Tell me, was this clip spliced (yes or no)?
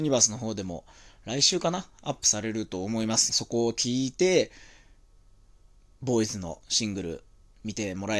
yes